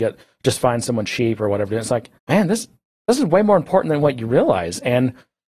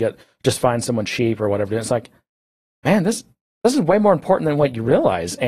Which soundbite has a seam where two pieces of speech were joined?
first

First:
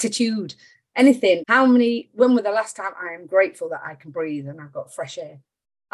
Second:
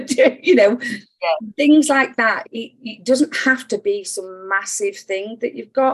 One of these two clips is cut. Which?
first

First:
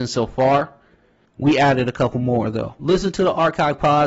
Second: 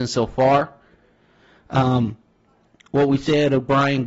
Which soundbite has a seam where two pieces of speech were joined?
first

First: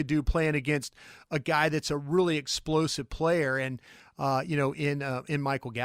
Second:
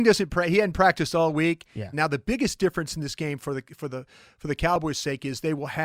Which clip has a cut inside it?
second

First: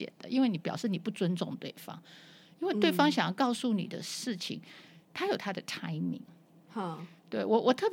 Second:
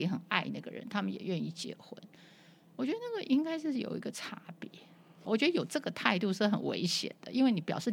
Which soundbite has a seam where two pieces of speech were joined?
second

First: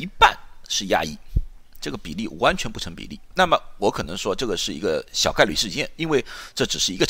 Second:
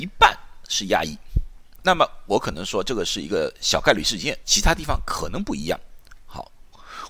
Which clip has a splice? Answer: second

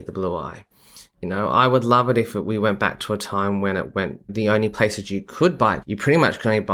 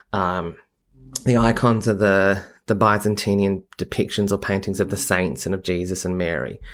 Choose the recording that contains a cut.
first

